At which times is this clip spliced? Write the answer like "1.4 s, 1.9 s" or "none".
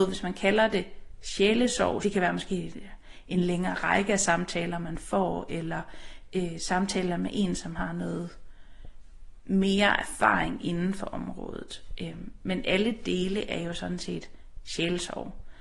2.0 s

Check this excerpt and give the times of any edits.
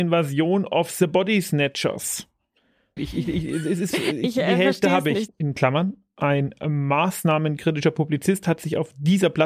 3.0 s, 5.3 s

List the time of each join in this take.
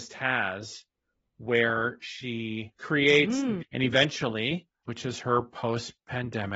3.6 s, 4.8 s

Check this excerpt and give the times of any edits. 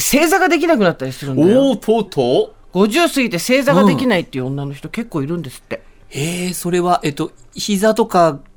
2.1 s

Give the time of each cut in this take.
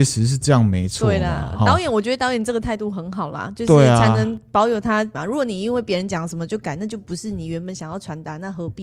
5.1 s

